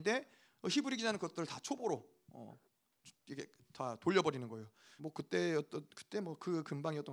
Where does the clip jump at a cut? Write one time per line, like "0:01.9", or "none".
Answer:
0:05.0